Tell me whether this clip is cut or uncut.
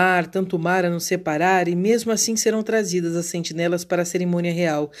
uncut